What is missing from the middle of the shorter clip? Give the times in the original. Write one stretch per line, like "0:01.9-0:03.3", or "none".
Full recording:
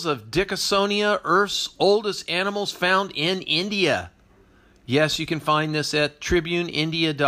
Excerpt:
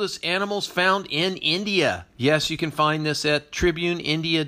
0:04.1-0:04.8